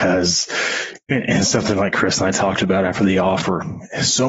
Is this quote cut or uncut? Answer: uncut